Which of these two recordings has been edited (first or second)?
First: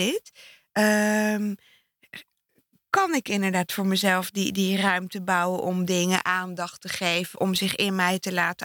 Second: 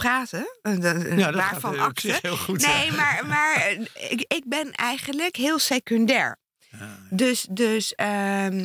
first